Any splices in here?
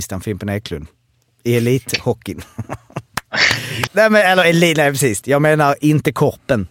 yes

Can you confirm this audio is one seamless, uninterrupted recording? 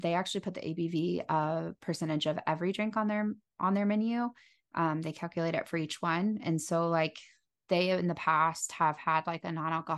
yes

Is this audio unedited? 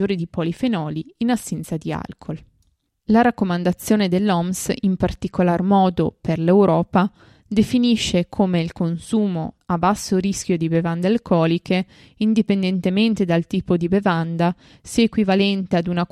yes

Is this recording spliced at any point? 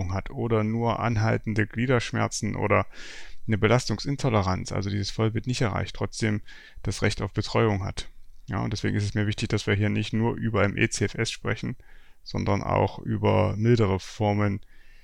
no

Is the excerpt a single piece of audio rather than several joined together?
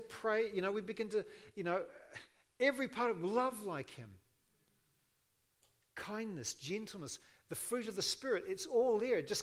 yes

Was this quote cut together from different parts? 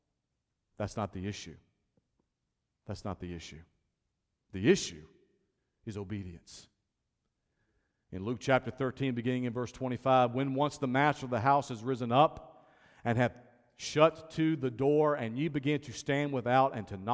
no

